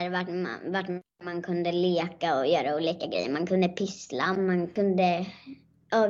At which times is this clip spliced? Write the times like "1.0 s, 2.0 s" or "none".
4.4 s